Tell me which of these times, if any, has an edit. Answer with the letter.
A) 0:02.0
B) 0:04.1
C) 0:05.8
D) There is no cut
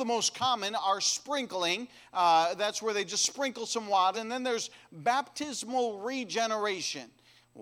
B